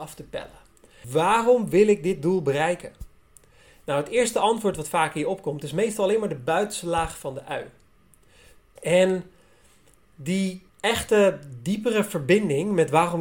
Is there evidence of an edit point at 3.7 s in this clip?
no; 3 cuts; at 1.0 s, 8.8 s, 10.7 s

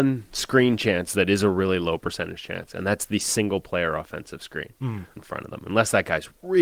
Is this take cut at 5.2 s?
yes; 1 cut; at 5.2 s

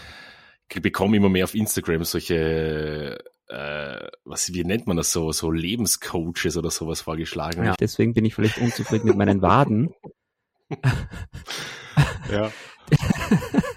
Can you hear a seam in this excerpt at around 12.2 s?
no; 1 cut; at 7.8 s

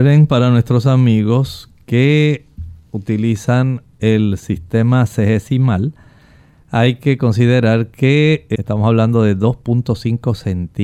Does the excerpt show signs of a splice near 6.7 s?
no; 1 cut; at 8.5 s

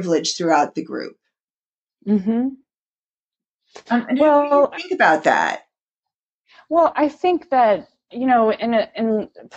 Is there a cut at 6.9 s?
yes; 1 cut; at 6.9 s

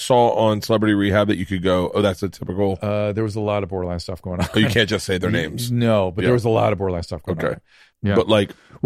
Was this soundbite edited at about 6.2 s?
no; 1 cut; at 7.9 s

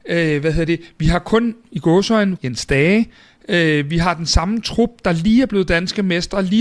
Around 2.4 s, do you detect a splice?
yes; 1 cut; at 2.4 s

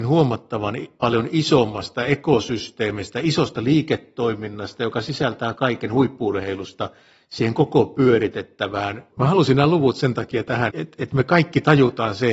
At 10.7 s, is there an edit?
yes; 2 cuts; at 9.1 s, 10.7 s

